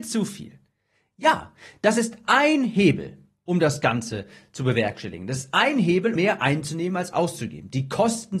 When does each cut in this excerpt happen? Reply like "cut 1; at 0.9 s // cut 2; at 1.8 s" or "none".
cut 1; at 6.2 s